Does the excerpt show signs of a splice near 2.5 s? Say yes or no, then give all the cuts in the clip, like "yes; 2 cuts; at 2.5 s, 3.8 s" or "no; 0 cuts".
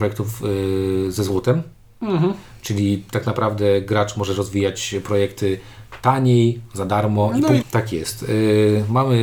no; 1 cut; at 7.6 s